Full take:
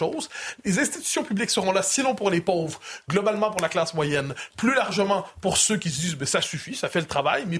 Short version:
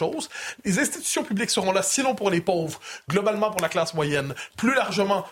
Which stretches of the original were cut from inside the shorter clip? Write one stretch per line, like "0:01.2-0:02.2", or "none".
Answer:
none